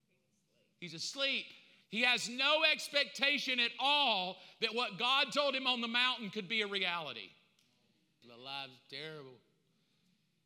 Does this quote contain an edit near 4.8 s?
no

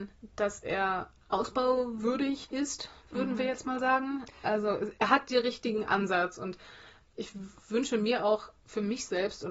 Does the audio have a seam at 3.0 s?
yes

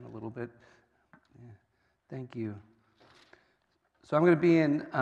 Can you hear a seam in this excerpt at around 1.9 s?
no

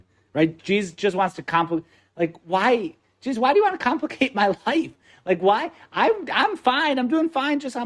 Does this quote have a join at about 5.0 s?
no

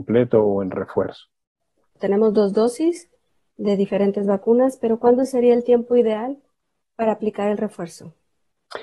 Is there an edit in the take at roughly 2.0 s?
yes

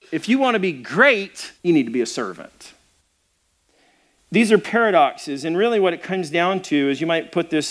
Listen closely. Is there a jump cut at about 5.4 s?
no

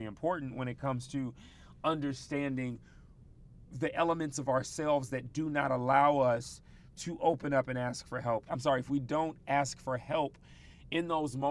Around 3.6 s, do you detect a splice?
no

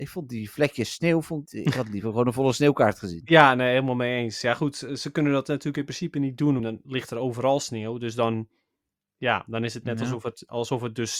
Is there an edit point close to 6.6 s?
yes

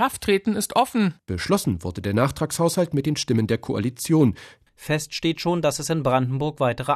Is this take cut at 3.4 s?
no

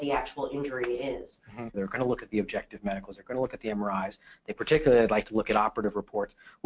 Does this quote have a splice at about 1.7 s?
yes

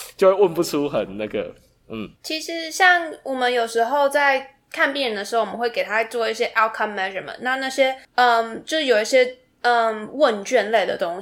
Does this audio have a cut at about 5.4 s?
no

